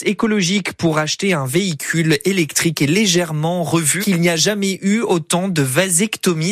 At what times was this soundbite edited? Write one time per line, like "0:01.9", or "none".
0:04.0